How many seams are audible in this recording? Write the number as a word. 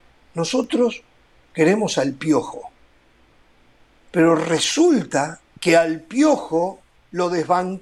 one